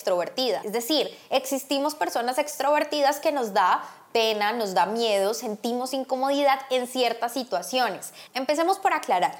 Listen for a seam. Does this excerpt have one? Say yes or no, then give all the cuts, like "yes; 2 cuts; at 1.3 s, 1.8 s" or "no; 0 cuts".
yes; 1 cut; at 8.3 s